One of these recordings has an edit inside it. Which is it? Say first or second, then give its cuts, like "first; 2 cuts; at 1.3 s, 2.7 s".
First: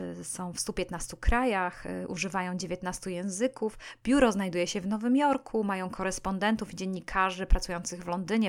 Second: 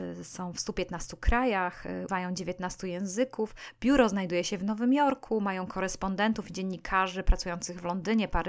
second; 1 cut; at 2.1 s